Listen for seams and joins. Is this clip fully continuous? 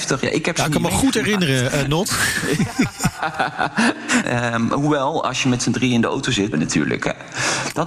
no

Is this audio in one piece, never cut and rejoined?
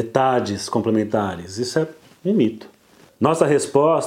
no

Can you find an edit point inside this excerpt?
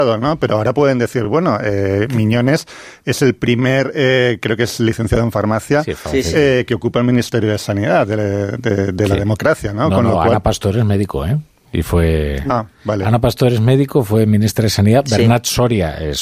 no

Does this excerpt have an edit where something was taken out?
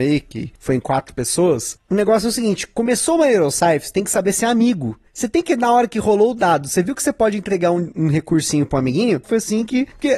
yes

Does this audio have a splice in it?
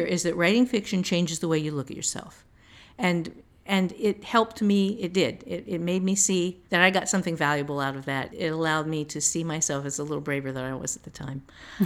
yes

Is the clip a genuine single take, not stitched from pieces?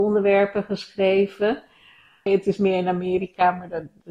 no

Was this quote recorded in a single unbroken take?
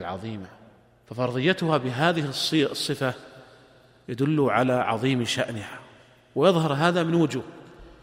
yes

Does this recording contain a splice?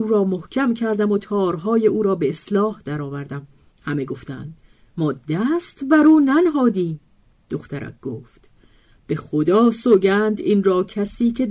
yes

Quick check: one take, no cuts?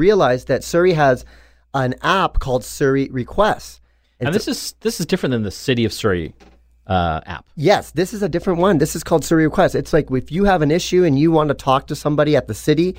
yes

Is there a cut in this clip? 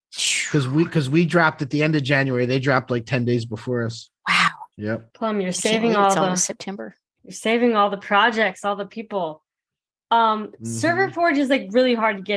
yes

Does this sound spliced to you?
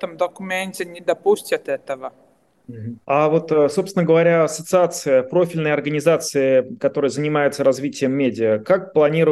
yes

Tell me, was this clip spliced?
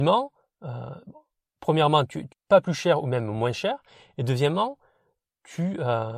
yes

